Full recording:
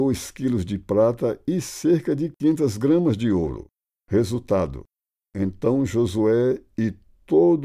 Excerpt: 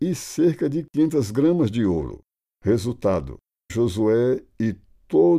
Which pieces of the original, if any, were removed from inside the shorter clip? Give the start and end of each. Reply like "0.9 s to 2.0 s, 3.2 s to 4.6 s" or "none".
5.2 s to 5.9 s